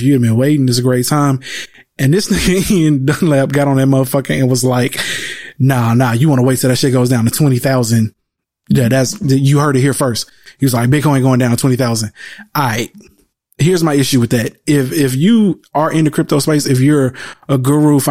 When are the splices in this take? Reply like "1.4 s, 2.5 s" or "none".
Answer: none